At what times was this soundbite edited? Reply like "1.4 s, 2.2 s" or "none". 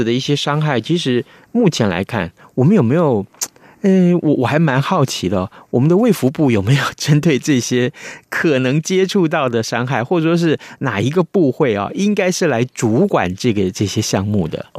none

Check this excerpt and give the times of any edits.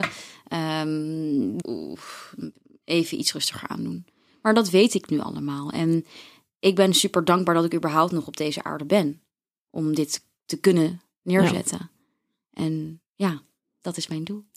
1.6 s

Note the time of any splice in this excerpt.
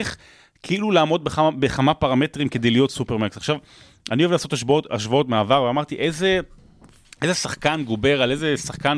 none

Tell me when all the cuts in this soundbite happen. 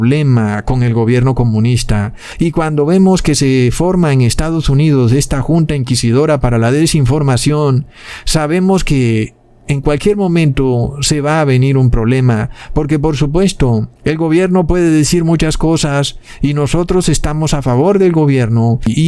2.3 s, 14.0 s

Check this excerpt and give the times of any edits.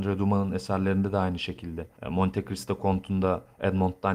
2.0 s

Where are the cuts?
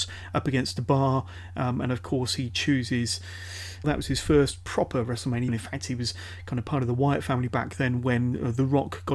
3.8 s, 5.5 s

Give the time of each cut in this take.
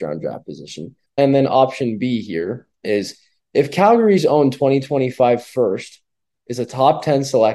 1.1 s

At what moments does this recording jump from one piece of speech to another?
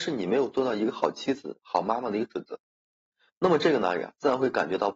none

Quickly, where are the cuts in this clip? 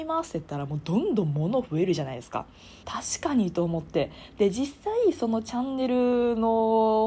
2.8 s

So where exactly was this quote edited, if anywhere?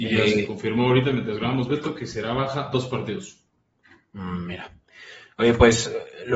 none

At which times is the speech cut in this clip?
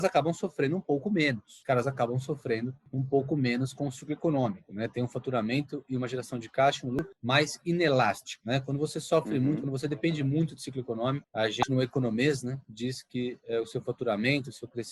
none

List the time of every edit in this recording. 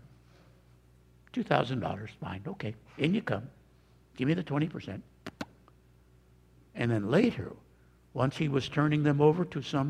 none

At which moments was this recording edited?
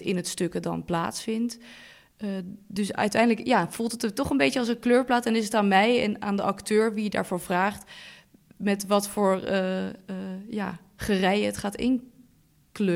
none

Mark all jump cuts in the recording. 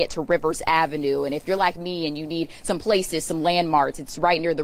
none

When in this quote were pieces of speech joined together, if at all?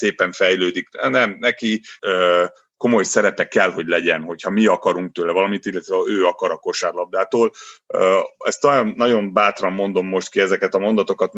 2.0 s

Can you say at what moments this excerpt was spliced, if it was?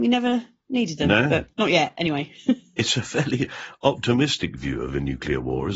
none

